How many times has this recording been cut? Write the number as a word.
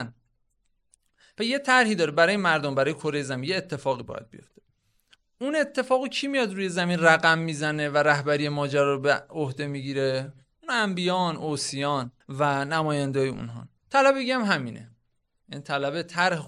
two